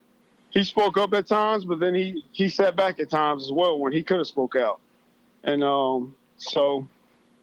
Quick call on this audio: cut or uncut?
uncut